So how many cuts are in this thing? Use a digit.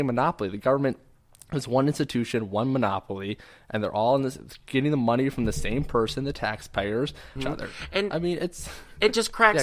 1